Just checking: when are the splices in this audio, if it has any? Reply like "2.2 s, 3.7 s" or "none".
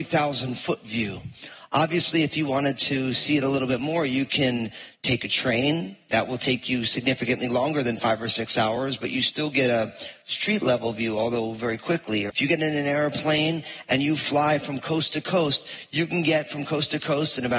12.3 s